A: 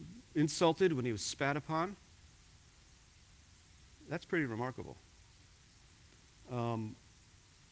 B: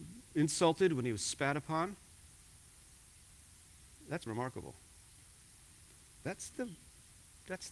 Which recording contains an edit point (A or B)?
B